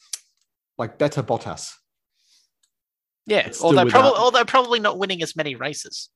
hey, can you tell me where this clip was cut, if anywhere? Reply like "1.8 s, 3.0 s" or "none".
none